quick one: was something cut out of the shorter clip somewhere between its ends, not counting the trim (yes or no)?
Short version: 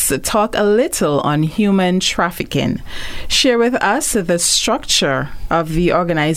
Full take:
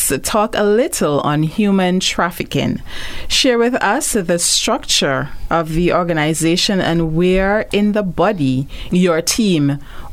no